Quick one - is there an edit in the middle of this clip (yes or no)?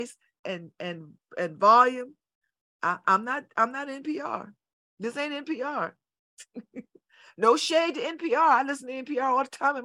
no